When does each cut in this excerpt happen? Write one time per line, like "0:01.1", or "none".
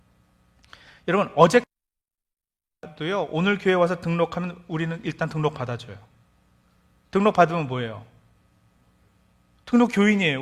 none